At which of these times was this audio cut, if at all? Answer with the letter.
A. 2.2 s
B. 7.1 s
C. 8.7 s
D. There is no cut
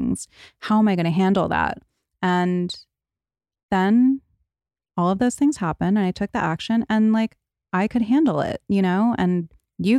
D